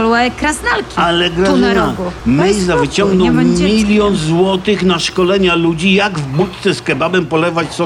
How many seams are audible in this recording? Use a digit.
1